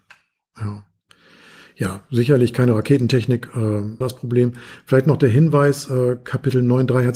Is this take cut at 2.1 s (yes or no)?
no